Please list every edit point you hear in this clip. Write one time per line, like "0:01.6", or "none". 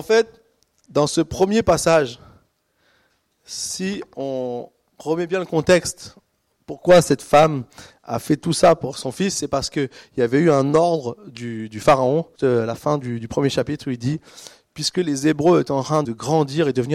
0:12.4
0:16.0